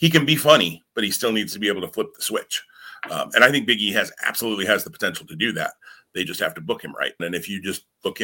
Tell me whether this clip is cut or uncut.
cut